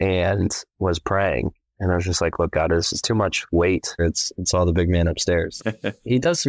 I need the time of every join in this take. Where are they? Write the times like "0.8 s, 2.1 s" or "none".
4.0 s, 5.6 s